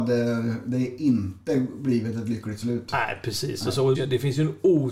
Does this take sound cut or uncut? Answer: cut